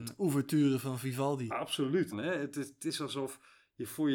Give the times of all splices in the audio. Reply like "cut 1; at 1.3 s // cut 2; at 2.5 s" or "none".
cut 1; at 2.1 s